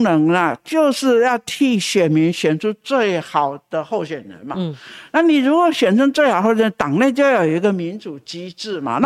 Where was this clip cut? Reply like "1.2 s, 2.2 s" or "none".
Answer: none